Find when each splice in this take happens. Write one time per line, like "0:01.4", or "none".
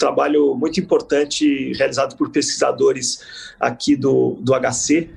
none